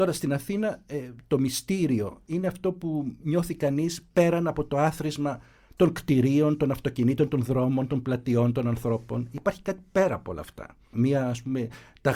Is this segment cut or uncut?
cut